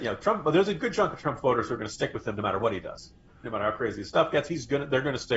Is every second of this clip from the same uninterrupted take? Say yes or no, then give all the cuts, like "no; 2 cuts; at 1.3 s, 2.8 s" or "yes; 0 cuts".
no; 1 cut; at 3.4 s